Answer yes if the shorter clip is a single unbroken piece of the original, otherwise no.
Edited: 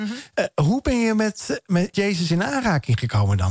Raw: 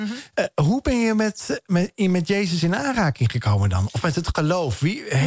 no